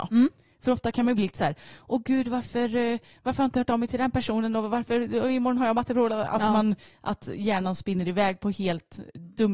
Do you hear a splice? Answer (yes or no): no